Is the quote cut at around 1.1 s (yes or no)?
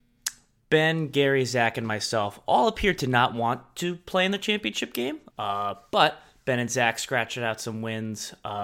no